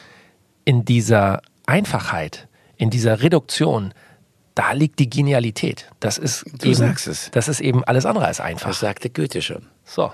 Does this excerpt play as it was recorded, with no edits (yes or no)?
yes